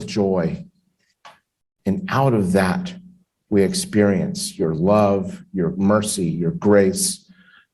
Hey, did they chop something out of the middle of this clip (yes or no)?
yes